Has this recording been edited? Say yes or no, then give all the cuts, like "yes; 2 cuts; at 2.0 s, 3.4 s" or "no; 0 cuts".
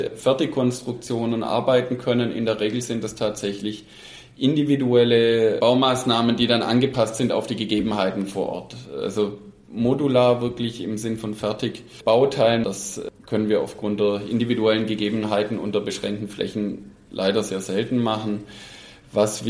yes; 1 cut; at 12.6 s